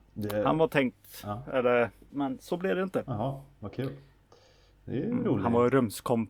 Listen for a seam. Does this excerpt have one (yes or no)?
yes